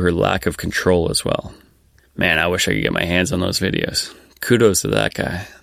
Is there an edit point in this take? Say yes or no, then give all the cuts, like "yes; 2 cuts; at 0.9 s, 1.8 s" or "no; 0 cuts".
yes; 1 cut; at 2.0 s